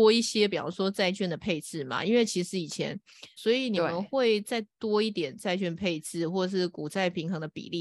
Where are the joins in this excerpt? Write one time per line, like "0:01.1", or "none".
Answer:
0:03.4